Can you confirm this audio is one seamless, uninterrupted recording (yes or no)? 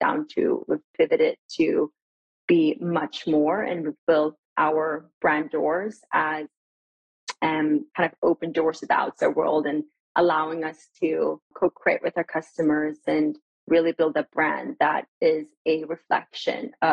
no